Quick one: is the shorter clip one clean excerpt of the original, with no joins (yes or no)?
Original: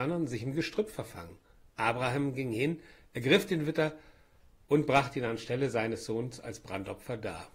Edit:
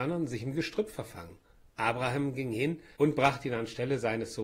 no